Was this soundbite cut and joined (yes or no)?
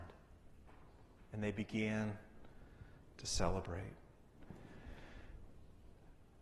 no